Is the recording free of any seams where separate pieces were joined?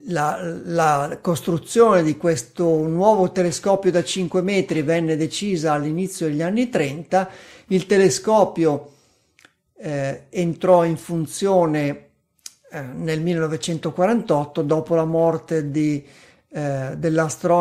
yes; 0 cuts

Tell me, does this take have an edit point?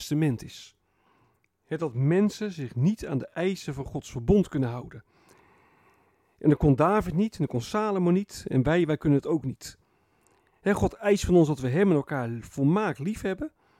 no; 0 cuts

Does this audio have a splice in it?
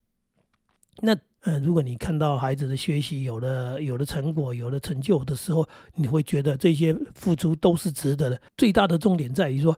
yes; 2 cuts; at 1.4 s, 8.5 s

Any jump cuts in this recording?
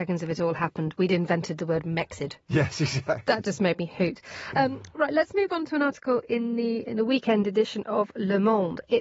yes; 1 cut; at 6.9 s

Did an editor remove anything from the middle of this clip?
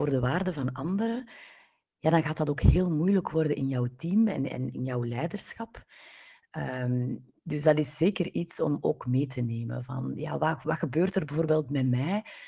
no; 0 cuts

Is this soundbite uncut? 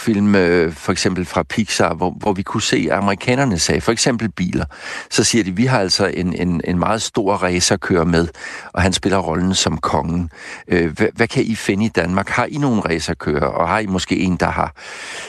yes; 0 cuts

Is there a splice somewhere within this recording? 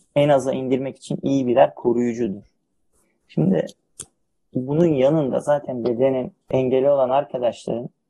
yes; 1 cut; at 6.4 s

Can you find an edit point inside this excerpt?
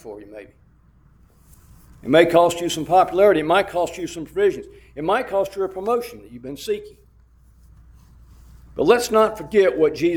no; 0 cuts

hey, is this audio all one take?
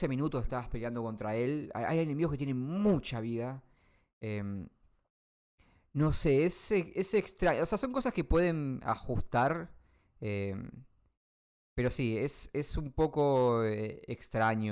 yes; 0 cuts

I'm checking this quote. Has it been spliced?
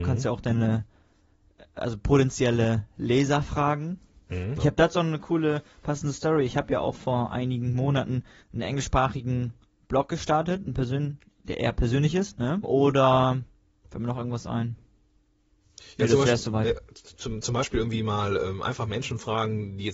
yes; 3 cuts; at 4.6 s, 8.4 s, 12.6 s

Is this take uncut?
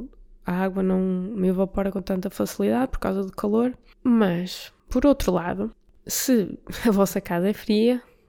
yes; 0 cuts

